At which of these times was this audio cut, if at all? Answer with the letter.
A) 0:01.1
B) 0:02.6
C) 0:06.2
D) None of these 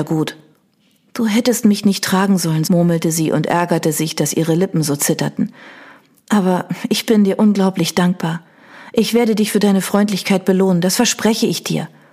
B